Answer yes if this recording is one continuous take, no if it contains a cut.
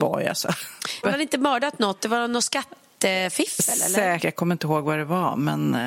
no